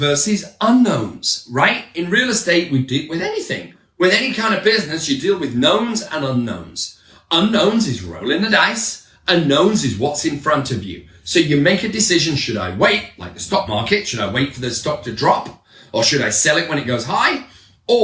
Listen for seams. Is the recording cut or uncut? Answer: uncut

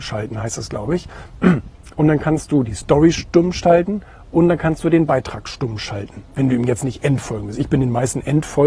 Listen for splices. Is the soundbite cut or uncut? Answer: uncut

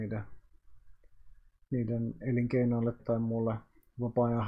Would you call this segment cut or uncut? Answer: cut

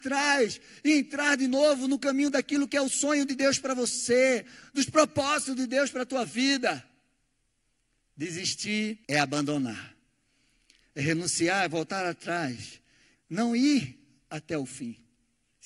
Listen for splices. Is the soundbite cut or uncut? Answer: cut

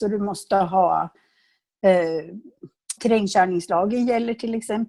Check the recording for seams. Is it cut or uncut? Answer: cut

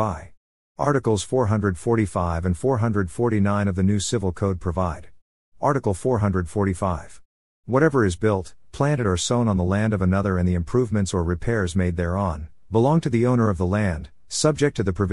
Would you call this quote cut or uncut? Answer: uncut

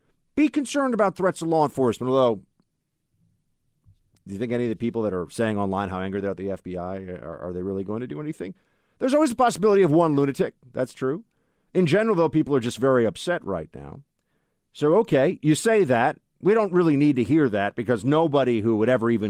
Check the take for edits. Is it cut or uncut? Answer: uncut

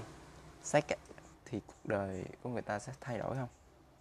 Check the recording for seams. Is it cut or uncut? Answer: cut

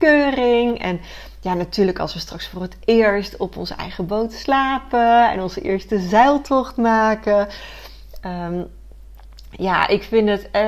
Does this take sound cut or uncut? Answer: uncut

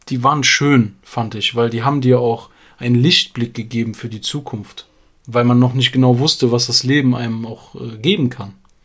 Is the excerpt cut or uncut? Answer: uncut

